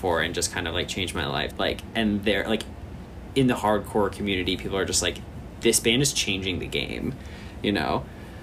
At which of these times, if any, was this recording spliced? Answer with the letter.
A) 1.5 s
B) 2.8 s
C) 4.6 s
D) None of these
A